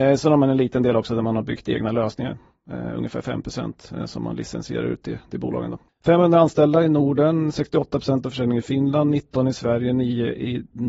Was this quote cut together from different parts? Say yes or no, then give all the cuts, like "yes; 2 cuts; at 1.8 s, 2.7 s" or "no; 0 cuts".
yes; 1 cut; at 5.9 s